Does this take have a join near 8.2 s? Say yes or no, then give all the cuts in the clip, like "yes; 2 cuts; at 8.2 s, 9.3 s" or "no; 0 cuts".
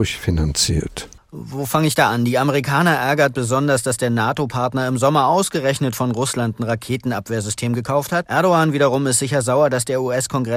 yes; 2 cuts; at 1.2 s, 8.2 s